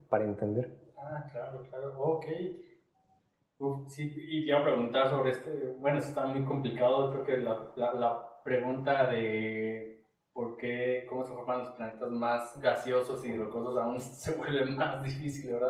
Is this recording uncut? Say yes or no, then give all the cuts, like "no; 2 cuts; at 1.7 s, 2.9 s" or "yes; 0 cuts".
yes; 0 cuts